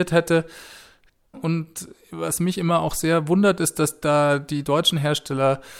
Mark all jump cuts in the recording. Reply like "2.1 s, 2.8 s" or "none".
1.3 s